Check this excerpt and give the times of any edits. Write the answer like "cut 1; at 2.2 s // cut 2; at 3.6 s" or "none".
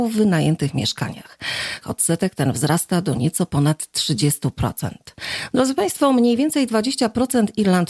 cut 1; at 1.8 s // cut 2; at 5.5 s